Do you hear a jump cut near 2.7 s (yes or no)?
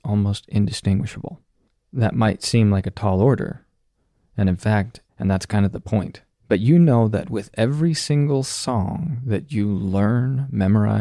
no